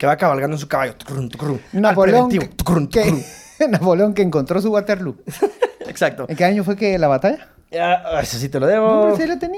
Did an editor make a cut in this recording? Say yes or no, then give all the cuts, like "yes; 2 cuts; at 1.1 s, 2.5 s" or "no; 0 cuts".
no; 0 cuts